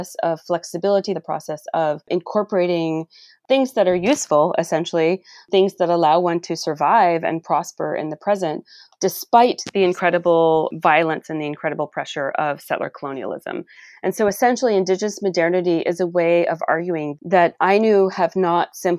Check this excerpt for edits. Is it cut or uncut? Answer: cut